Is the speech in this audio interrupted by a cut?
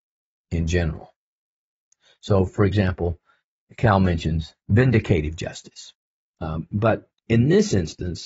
yes; 2 cuts; at 4.6 s, 6.2 s

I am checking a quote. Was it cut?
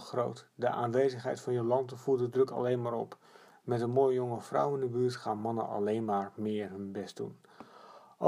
no; 0 cuts

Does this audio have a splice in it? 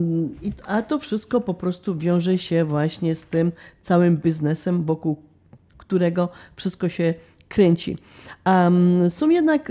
no; 0 cuts

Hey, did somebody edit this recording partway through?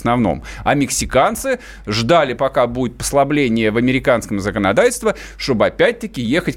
no; 0 cuts

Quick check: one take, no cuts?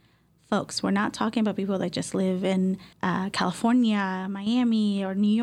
no; 1 cut; at 2.9 s

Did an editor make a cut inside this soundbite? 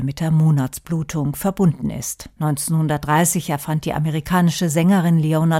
yes; 1 cut; at 2.4 s

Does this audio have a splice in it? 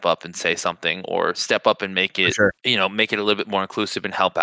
yes; 1 cut; at 2.6 s

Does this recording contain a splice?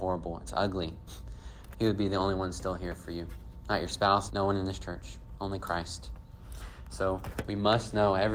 yes; 2 cuts; at 1.7 s, 4.3 s

